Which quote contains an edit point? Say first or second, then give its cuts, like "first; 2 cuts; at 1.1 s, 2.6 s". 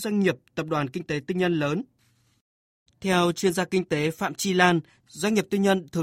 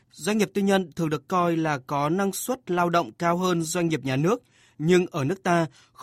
first; 1 cut; at 2.9 s